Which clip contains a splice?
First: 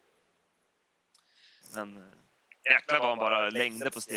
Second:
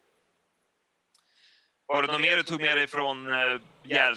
first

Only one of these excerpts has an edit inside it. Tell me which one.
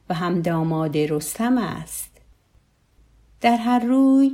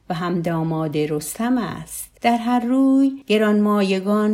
second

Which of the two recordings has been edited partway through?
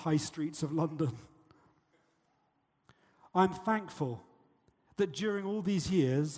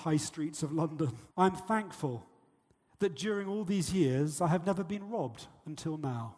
second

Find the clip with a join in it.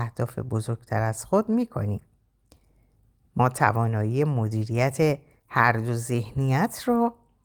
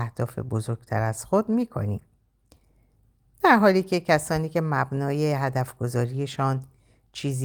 second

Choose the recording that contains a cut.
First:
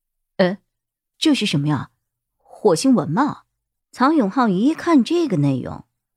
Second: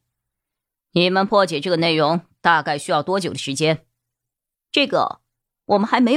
first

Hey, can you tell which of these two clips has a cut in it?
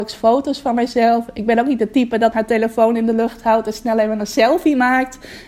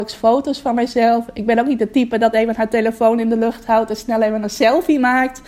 first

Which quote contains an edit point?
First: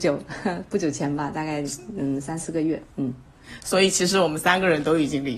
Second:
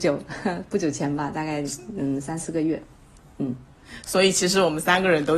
first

